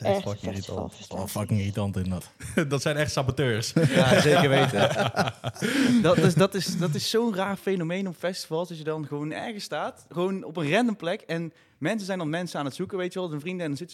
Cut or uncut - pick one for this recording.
uncut